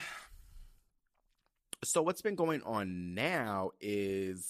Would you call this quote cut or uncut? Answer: uncut